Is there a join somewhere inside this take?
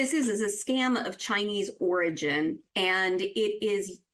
yes; 1 cut; at 2.7 s

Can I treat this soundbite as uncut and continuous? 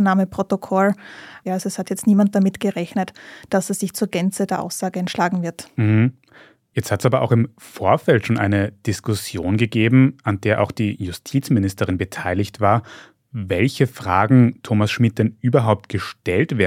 no; 1 cut; at 1.5 s

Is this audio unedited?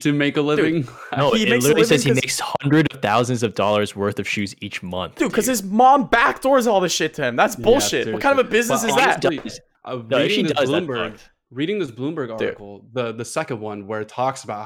yes; 0 cuts

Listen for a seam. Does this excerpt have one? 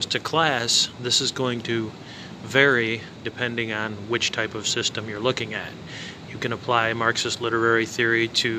no; 0 cuts

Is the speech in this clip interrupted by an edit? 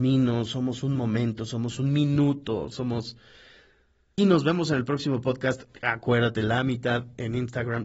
yes; 1 cut; at 4.2 s

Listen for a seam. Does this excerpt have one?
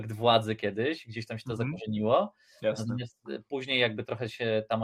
no; 0 cuts

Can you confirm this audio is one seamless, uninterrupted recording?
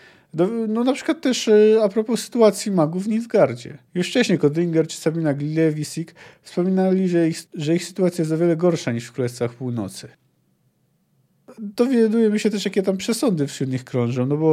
no; 2 cuts; at 3.9 s, 7.5 s

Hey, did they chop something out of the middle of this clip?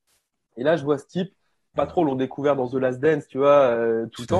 yes; 1 cut; at 1.8 s

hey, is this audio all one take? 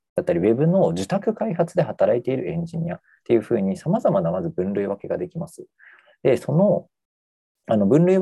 yes; 0 cuts

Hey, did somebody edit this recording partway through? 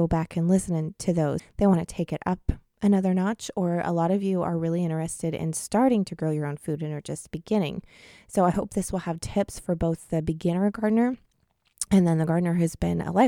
yes; 1 cut; at 1.4 s

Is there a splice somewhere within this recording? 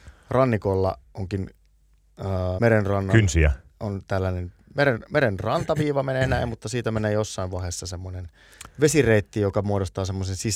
yes; 1 cut; at 2.6 s

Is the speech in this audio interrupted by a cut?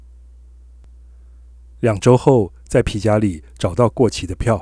yes; 1 cut; at 1.7 s

